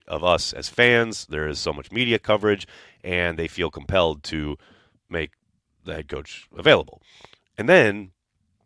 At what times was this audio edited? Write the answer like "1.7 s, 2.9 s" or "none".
none

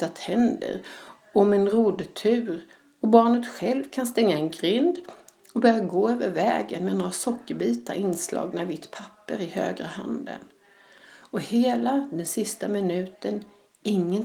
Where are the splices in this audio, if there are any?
none

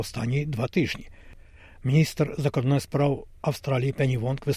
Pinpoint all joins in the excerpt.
none

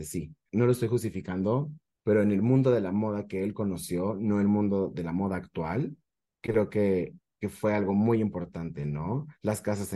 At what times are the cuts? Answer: none

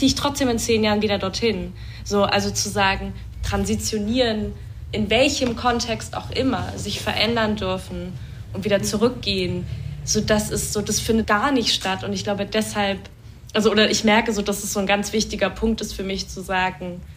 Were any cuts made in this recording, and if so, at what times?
3.3 s, 11.2 s

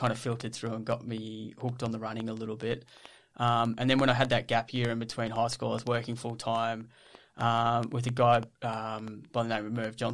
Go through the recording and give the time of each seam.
8.5 s

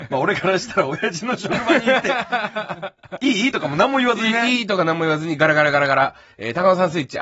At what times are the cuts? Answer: none

